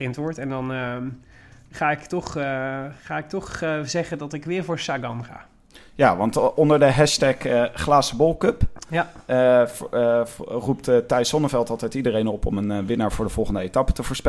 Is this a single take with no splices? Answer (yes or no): yes